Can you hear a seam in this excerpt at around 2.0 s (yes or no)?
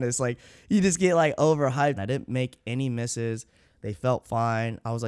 yes